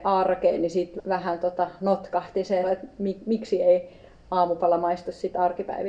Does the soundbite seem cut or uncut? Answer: cut